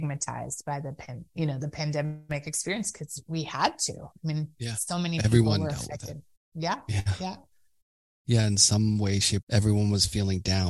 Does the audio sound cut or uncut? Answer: cut